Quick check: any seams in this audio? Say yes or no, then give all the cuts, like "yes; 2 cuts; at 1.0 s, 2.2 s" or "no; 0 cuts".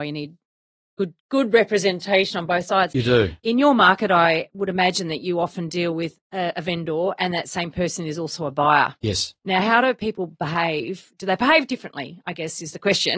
no; 0 cuts